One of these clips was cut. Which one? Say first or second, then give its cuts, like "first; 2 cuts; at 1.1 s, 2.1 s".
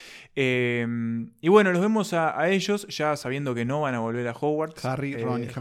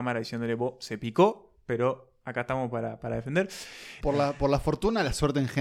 second; 1 cut; at 4.0 s